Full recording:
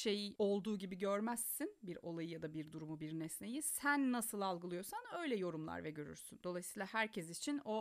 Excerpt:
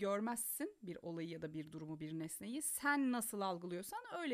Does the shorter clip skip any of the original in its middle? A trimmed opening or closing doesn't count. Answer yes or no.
no